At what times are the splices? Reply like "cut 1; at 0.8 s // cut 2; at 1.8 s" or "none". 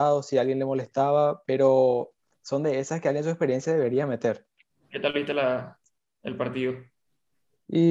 cut 1; at 4.9 s